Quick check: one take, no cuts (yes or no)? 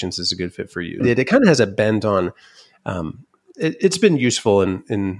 no